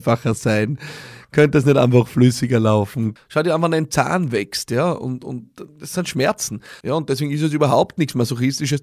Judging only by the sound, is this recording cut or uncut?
cut